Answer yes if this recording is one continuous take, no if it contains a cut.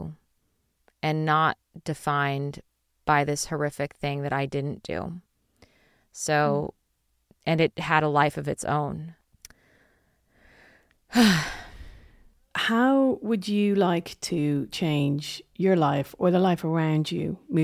no